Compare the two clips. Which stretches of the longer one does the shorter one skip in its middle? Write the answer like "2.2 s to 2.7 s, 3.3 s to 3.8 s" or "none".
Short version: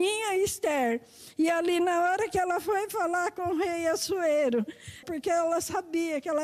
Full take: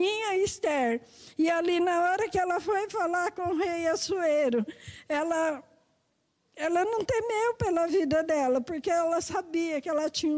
5.0 s to 8.6 s